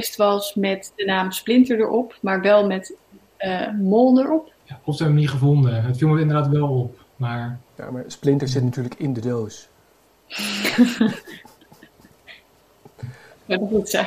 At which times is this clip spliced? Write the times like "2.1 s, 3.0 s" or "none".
4.6 s, 7.7 s